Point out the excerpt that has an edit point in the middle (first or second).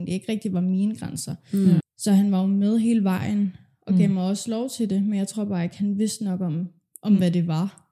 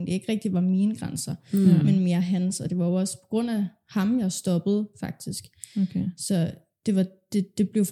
first